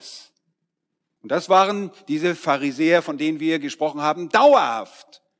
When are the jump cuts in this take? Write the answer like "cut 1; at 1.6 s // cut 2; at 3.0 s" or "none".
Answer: cut 1; at 1.2 s